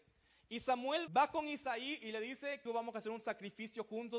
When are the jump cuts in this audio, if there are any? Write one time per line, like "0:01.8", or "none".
0:01.1
0:02.7